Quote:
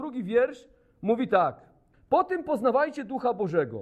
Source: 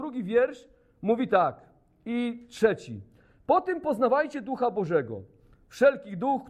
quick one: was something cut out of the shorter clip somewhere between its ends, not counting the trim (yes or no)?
yes